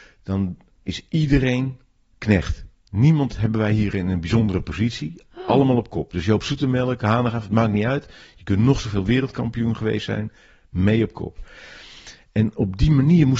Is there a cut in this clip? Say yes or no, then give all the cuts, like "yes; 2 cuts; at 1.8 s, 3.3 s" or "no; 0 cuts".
no; 0 cuts